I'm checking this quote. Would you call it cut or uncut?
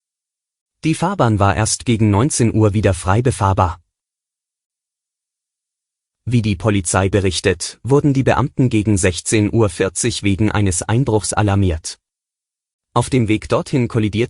cut